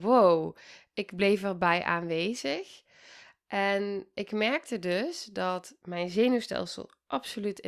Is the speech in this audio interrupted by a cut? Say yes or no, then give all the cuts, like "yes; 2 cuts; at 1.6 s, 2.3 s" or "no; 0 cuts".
no; 0 cuts